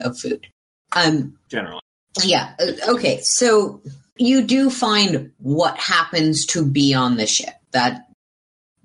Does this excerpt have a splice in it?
yes; 1 cut; at 4.2 s

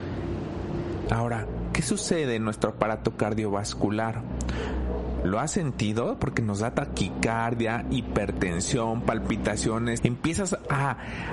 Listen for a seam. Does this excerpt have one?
yes; 2 cuts; at 1.1 s, 10.0 s

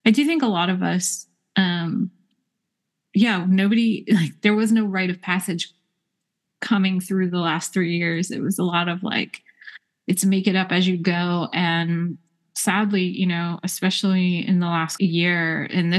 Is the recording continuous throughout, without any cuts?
no; 2 cuts; at 12.4 s, 15.0 s

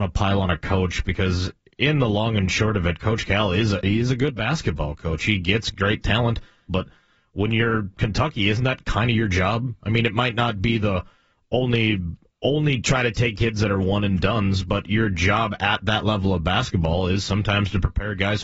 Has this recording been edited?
yes; 1 cut; at 6.7 s

